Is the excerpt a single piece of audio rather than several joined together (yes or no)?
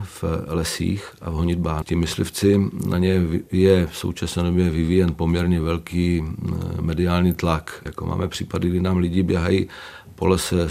no